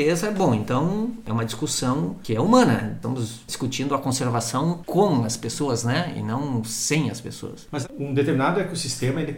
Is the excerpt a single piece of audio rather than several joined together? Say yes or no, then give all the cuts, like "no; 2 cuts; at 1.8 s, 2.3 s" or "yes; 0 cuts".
yes; 0 cuts